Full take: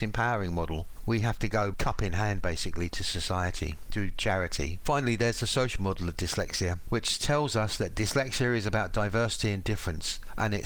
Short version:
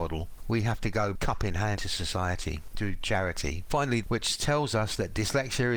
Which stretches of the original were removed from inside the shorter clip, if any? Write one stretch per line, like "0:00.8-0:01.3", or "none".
0:02.3-0:02.9
0:05.2-0:06.8